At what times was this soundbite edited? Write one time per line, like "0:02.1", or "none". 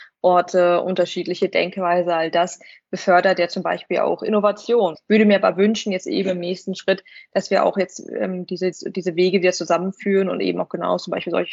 0:04.9
0:08.7